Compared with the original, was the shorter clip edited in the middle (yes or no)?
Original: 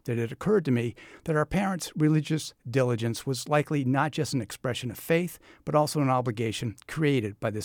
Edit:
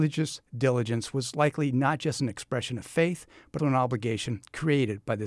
yes